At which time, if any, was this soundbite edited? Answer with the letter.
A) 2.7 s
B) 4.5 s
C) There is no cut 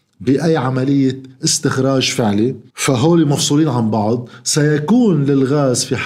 A